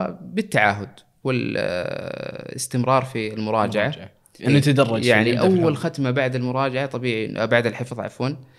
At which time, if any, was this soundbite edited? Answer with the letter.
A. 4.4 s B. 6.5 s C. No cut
A